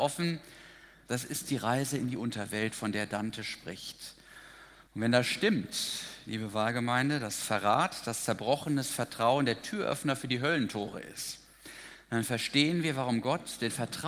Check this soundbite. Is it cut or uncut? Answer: cut